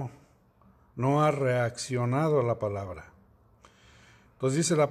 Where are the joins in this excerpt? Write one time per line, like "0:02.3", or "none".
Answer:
none